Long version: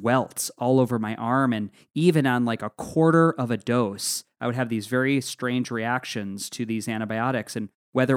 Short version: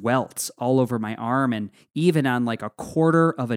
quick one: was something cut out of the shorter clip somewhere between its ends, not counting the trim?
no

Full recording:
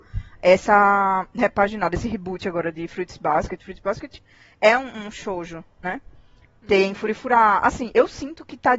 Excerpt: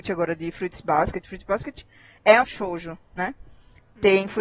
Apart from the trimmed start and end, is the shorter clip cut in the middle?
yes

